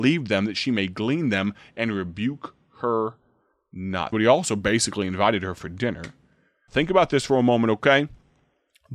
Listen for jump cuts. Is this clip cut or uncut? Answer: cut